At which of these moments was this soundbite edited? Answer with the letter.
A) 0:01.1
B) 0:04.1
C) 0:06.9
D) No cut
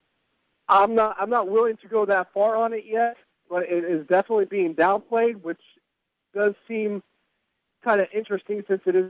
D